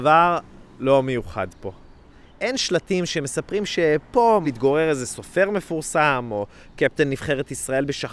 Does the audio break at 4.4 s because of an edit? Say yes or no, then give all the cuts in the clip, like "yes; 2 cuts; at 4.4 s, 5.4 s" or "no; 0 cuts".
yes; 1 cut; at 4.4 s